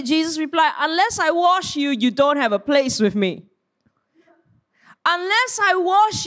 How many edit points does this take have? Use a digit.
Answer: 0